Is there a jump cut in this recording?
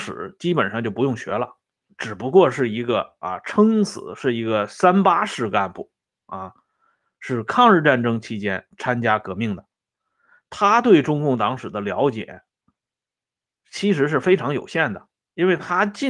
yes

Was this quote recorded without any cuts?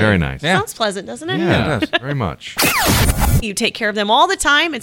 no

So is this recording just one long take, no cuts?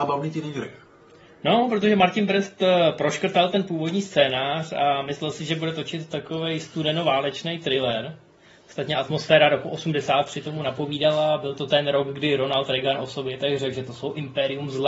yes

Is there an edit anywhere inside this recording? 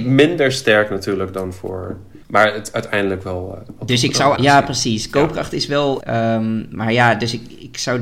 yes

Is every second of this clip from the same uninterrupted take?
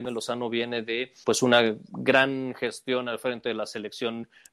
no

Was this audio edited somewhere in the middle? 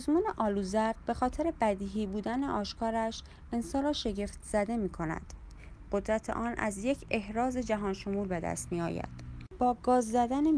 no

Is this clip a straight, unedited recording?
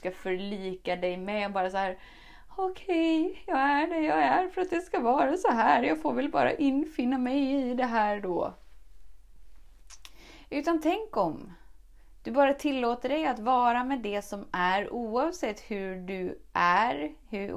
yes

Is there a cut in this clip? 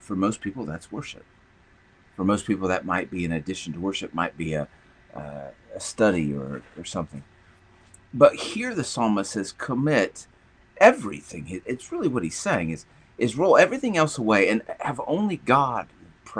no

